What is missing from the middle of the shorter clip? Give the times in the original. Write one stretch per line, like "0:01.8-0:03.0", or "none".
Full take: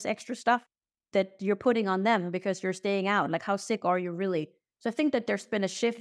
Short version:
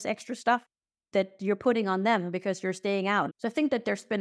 0:03.3-0:04.7